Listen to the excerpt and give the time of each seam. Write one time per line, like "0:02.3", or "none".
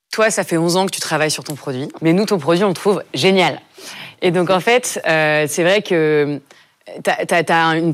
0:02.0